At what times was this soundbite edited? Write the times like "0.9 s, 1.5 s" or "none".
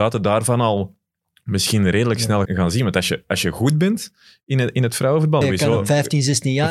2.5 s, 5.4 s